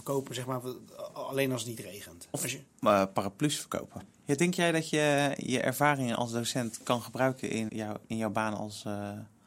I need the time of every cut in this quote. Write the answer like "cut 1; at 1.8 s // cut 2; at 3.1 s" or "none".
cut 1; at 4.1 s // cut 2; at 7.7 s